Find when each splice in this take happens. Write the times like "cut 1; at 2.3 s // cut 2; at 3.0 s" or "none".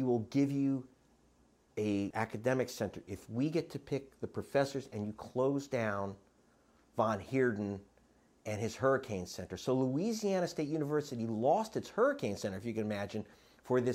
cut 1; at 2.1 s